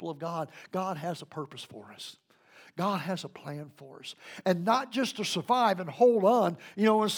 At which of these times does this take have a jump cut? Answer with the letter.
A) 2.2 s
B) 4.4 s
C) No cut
C